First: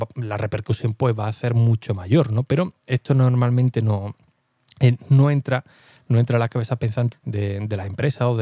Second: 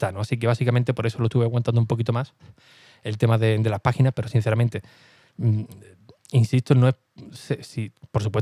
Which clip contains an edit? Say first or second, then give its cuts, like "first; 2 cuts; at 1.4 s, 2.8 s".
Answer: first; 1 cut; at 7.1 s